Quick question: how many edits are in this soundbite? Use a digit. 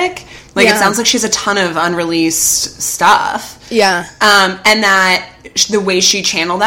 0